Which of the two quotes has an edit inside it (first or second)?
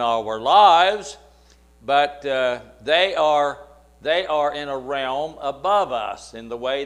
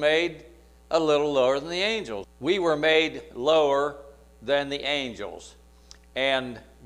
second